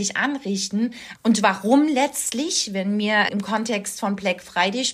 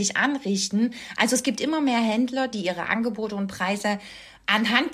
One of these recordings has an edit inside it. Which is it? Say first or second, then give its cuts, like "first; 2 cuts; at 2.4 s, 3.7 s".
first; 2 cuts; at 1.2 s, 3.3 s